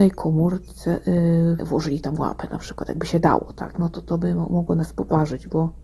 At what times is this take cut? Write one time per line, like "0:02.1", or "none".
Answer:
0:01.6